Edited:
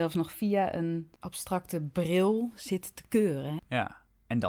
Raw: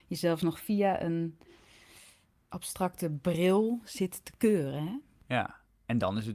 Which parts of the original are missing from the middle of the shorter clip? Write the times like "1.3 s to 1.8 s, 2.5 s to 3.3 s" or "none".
1.4 s to 2.4 s, 4.9 s to 5.2 s